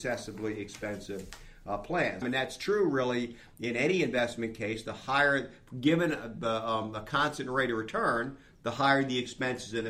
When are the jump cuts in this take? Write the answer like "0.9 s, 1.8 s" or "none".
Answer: 2.2 s